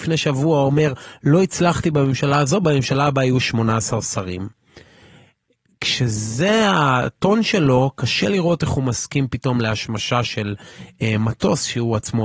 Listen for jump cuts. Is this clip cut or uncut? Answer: uncut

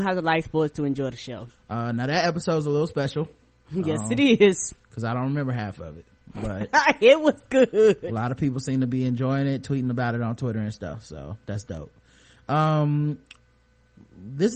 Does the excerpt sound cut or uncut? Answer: cut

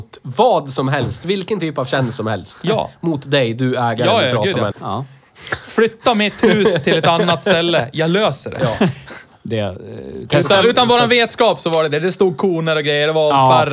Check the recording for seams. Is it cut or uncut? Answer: cut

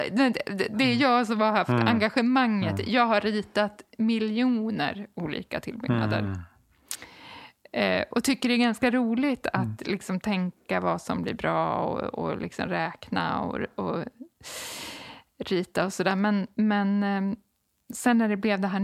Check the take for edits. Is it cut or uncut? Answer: uncut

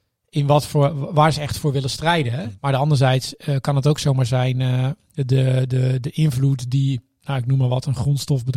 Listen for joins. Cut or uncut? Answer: cut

